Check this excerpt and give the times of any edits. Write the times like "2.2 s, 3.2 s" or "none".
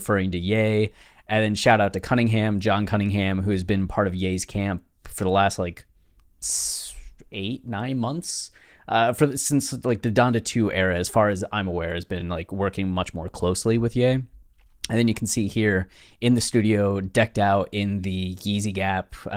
none